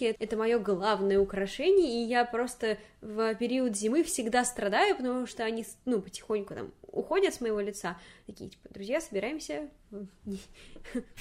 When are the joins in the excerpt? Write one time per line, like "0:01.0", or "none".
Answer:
none